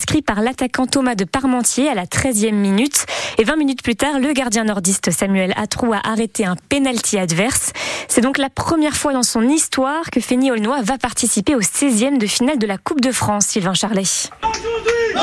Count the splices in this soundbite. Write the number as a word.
zero